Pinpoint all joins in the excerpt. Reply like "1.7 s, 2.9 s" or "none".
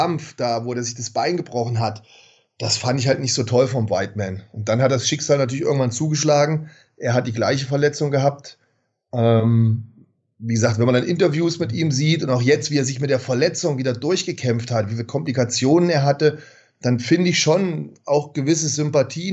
none